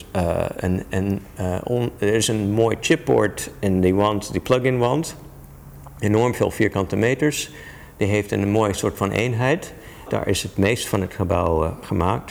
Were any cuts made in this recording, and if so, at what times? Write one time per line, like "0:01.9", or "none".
0:10.1